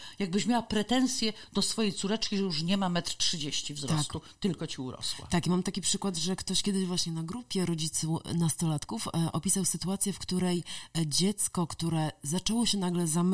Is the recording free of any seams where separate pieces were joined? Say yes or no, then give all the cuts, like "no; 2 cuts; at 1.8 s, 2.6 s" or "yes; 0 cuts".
yes; 0 cuts